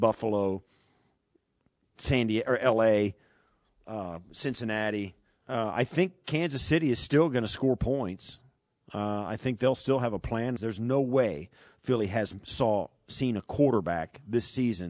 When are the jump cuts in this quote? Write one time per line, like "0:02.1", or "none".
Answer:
0:05.4
0:10.6